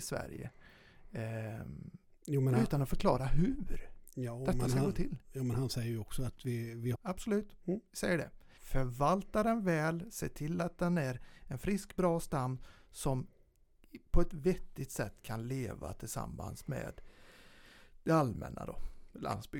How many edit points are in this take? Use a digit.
2